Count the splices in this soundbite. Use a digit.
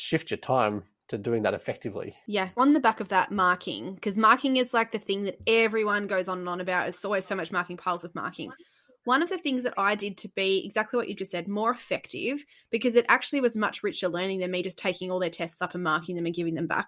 0